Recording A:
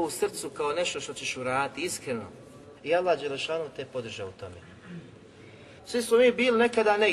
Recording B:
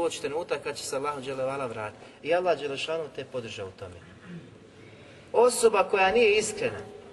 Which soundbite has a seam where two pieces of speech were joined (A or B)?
A